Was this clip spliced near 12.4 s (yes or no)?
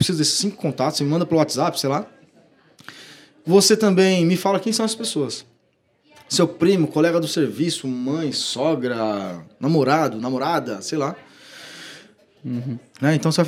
yes